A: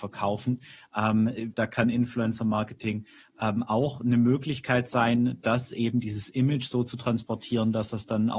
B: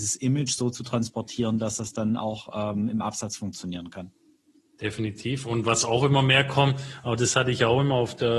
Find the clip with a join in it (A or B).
A